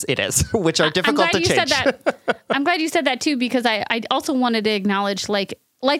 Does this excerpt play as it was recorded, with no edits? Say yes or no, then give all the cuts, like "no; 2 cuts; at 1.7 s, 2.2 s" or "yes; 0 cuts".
yes; 0 cuts